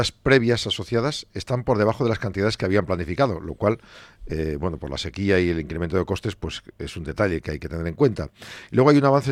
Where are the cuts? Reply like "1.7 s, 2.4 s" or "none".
none